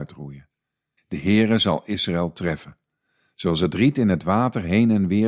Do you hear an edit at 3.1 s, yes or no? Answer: no